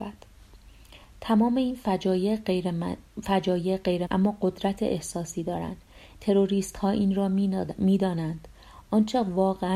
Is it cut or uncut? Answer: cut